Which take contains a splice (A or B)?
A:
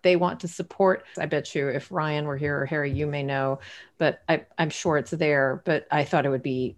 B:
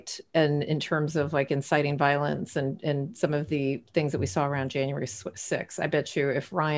A